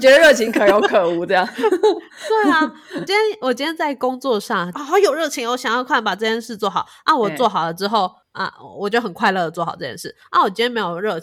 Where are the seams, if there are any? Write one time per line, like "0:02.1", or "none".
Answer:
0:04.7